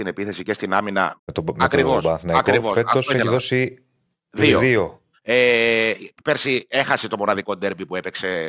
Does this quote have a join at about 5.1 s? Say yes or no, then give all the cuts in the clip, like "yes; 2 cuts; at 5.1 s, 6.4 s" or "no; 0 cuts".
yes; 2 cuts; at 1.2 s, 5.1 s